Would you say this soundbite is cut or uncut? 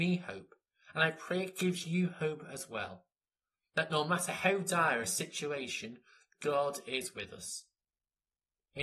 uncut